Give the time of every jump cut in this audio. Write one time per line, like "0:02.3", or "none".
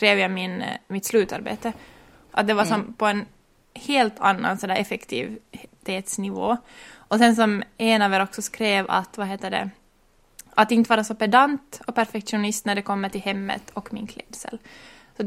0:02.3